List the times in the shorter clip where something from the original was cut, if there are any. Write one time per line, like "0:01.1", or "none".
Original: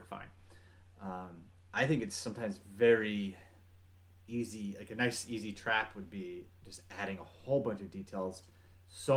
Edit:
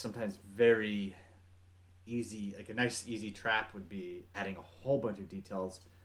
0:04.3